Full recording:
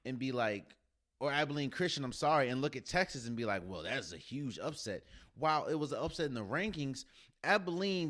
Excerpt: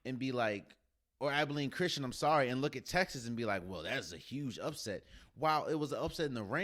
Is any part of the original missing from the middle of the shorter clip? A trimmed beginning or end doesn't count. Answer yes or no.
no